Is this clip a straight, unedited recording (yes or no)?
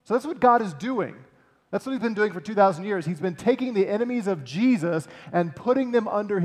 yes